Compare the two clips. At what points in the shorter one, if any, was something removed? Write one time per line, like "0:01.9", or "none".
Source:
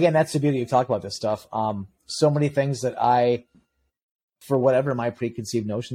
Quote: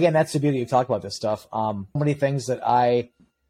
0:02.0